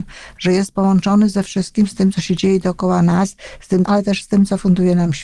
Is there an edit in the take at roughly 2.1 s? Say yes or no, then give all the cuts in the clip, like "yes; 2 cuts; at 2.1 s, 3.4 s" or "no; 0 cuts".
no; 1 cut; at 3.9 s